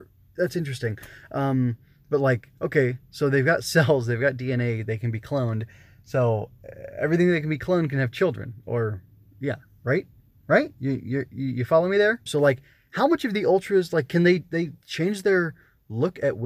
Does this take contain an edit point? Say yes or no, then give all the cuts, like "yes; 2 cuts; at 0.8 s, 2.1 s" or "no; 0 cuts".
yes; 1 cut; at 12.3 s